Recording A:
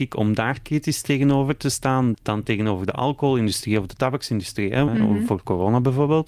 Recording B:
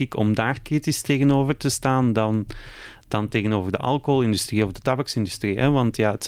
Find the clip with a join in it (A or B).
A